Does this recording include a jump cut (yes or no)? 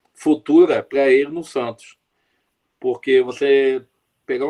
no